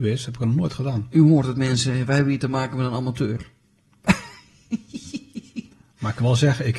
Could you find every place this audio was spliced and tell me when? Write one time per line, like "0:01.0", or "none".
none

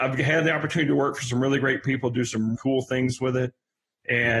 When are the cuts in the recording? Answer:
0:02.5

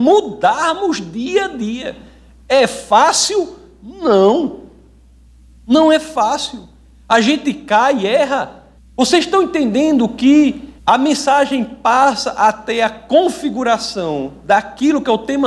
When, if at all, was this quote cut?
0:08.8
0:10.8

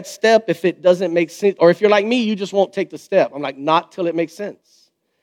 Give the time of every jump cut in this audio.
0:01.6

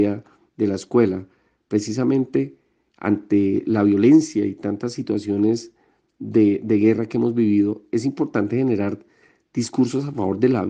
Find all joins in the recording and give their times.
none

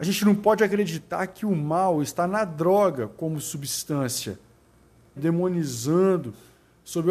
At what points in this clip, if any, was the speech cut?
0:05.2

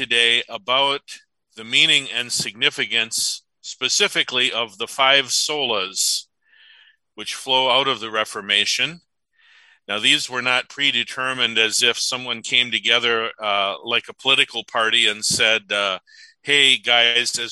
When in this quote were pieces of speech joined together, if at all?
none

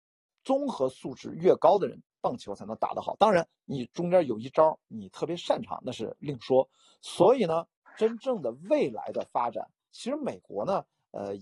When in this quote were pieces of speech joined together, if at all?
none

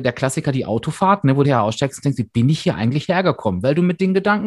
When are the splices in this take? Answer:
0:01.4

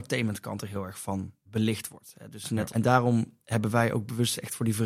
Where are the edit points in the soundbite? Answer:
0:01.5
0:02.7

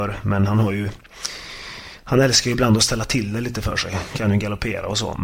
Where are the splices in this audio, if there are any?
none

